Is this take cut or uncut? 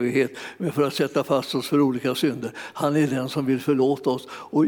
uncut